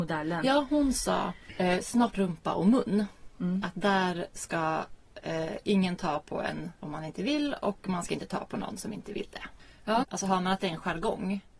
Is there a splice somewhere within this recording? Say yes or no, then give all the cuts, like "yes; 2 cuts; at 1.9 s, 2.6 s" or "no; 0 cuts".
yes; 2 cuts; at 2.1 s, 10.0 s